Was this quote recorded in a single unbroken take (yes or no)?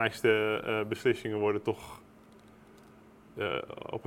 yes